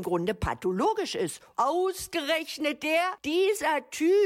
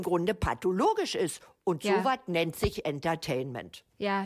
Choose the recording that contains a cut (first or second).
first